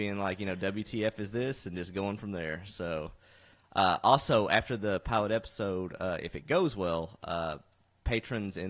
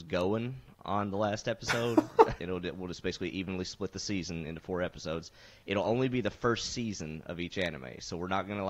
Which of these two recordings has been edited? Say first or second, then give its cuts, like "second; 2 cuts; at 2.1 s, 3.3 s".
second; 1 cut; at 2.4 s